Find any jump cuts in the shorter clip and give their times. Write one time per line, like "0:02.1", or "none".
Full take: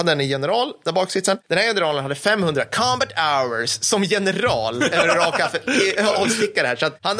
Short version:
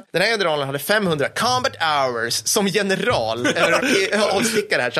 0:03.8